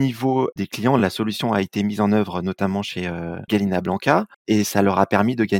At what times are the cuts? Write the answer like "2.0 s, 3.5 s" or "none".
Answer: none